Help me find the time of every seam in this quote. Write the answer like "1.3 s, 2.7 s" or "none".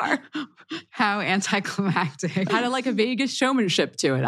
2.5 s